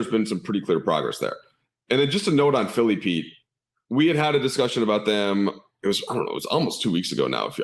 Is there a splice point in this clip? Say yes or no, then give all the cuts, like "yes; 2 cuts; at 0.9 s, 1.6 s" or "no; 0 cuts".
no; 0 cuts